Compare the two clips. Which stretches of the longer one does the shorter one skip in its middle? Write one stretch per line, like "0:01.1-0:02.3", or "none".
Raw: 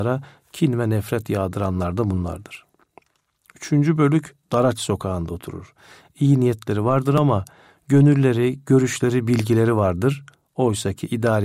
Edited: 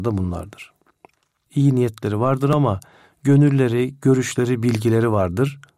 0:03.4-0:06.1